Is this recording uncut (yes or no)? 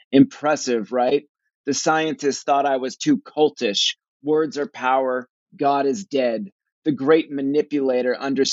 yes